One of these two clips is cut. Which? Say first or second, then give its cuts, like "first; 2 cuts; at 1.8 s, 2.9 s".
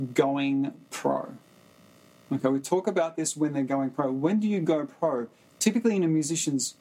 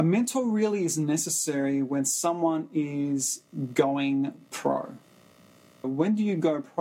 second; 1 cut; at 5.8 s